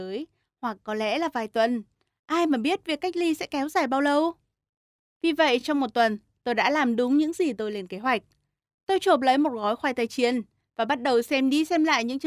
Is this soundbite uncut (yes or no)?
yes